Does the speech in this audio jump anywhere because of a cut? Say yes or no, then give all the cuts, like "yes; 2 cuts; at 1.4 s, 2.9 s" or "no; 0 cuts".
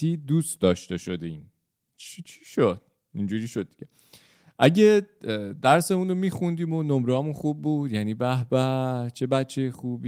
no; 0 cuts